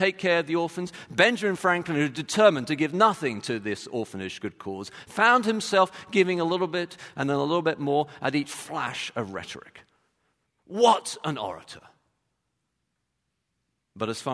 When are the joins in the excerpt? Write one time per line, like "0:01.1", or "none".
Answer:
0:10.5